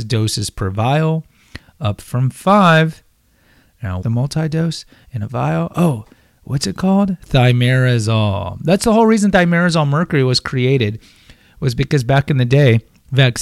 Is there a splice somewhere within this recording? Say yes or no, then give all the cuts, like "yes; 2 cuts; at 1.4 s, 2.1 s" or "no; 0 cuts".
yes; 1 cut; at 4.0 s